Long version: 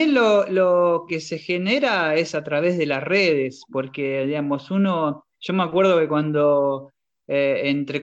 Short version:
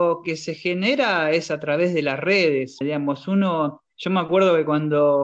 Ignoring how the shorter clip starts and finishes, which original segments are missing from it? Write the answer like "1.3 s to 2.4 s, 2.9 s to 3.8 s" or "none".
3.6 s to 4.2 s